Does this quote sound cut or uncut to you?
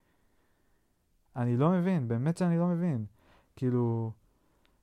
cut